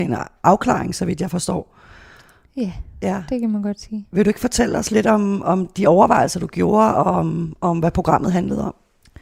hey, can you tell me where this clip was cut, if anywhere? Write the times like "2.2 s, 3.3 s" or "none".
none